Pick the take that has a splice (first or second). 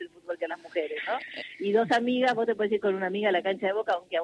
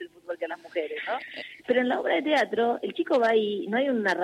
second